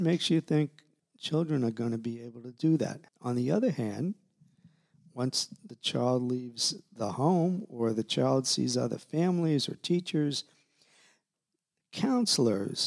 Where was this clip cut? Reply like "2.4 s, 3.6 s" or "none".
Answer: 1.0 s, 3.1 s